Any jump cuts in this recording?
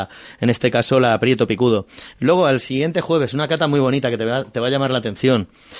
no; 0 cuts

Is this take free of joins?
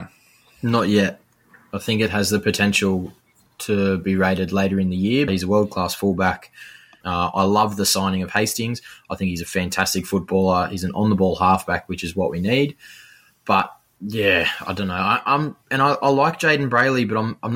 no; 2 cuts; at 5.3 s, 7.0 s

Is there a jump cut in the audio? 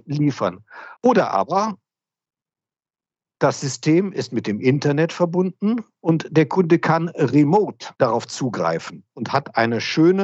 yes; 2 cuts; at 1.0 s, 7.9 s

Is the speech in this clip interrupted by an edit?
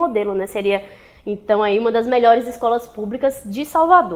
no; 0 cuts

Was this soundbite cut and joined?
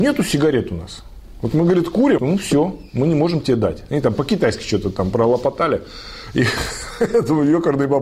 yes; 1 cut; at 2.2 s

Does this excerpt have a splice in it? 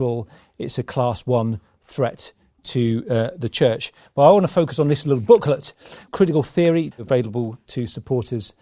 yes; 2 cuts; at 4.1 s, 6.9 s

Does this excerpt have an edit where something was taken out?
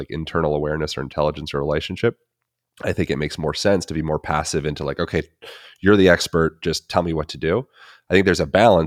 no; 0 cuts

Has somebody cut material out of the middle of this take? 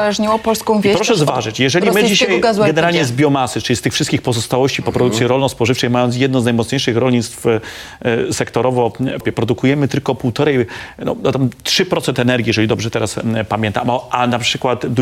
yes; 1 cut; at 9.2 s

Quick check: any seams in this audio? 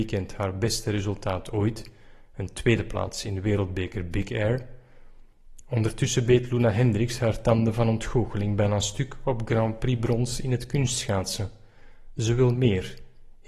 no; 0 cuts

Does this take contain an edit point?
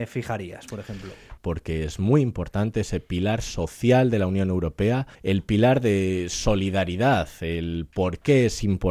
yes; 2 cuts; at 1.4 s, 5.1 s

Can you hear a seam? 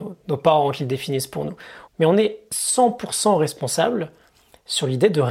yes; 1 cut; at 1.9 s

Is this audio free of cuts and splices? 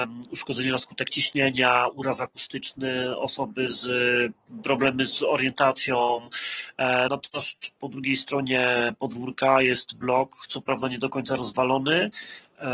no; 1 cut; at 7.1 s

